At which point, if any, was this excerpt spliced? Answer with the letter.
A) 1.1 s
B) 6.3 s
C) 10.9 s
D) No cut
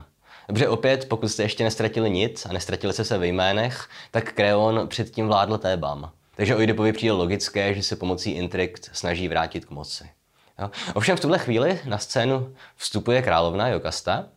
B